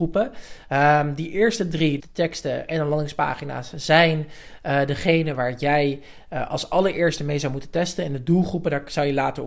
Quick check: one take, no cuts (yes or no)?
no